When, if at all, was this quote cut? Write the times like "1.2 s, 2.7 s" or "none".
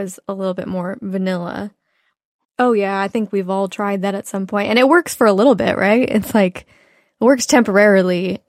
2.4 s

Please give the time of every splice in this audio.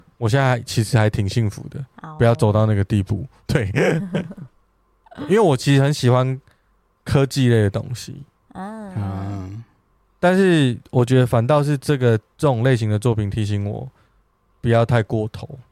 none

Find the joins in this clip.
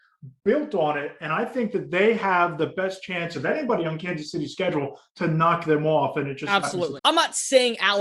7.0 s

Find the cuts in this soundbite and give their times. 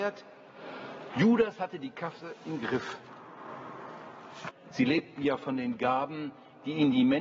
1.1 s, 4.5 s

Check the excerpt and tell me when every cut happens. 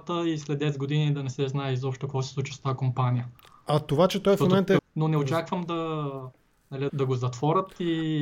4.8 s, 6.9 s

